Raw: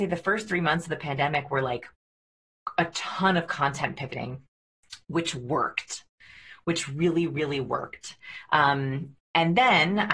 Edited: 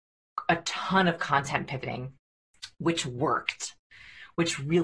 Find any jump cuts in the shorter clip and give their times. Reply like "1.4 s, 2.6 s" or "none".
none